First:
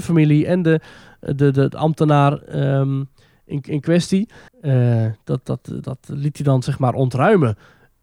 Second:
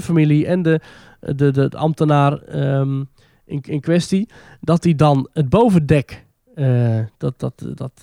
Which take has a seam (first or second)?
first